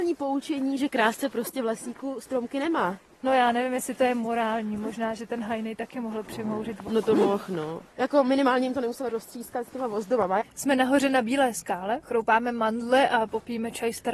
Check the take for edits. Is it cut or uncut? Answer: cut